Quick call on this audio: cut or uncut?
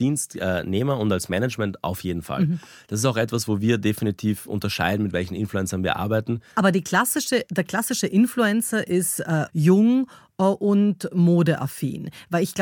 cut